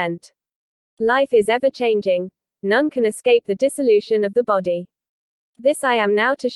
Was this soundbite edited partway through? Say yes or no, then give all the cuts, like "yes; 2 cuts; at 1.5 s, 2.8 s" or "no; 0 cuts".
no; 0 cuts